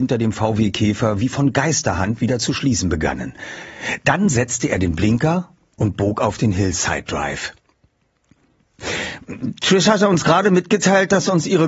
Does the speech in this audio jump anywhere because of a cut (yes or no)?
no